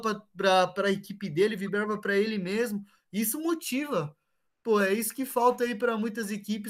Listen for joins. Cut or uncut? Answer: uncut